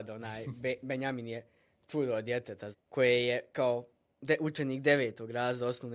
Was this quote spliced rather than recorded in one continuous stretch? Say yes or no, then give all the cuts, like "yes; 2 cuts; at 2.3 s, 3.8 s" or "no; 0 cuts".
yes; 1 cut; at 2.7 s